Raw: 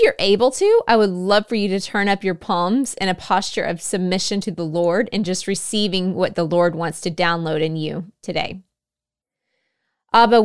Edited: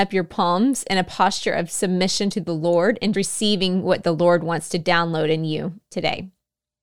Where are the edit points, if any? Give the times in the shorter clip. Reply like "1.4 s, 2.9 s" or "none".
3.1 s